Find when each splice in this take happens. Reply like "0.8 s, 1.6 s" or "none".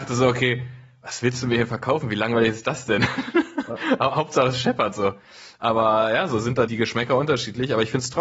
6.7 s